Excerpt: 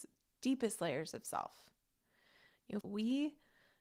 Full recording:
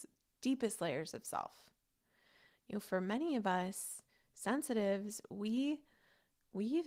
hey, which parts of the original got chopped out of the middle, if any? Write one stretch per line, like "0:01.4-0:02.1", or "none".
0:02.8-0:05.3